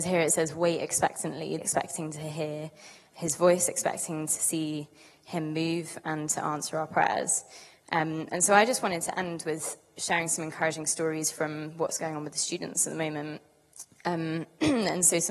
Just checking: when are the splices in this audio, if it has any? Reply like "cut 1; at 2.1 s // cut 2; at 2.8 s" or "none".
cut 1; at 1.6 s